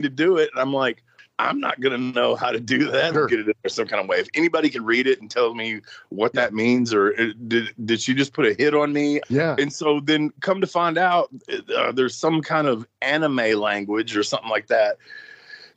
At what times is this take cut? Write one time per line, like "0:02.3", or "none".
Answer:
0:03.1
0:09.2